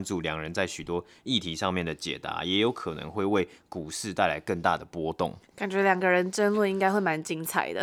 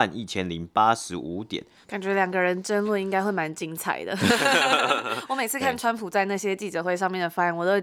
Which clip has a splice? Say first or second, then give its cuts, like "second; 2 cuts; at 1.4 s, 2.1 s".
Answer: second; 1 cut; at 1.8 s